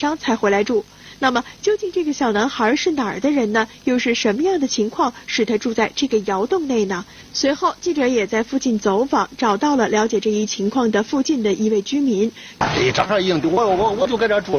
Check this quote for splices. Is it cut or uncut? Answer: cut